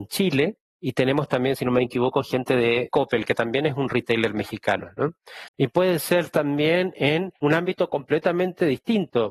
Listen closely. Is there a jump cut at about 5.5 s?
yes; 1 cut; at 5.5 s

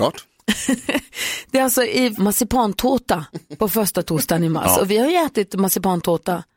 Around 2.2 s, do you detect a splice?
yes; 1 cut; at 2.2 s

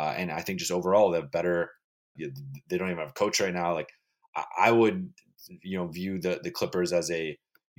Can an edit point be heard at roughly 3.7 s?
no; 1 cut; at 2.2 s

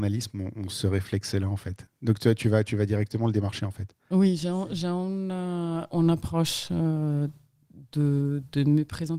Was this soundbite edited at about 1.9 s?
yes; 1 cut; at 1.9 s

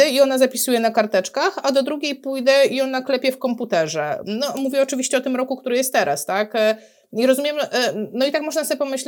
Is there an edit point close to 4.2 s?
no; 0 cuts

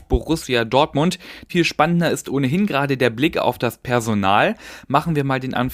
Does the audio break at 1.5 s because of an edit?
yes; 1 cut; at 1.5 s

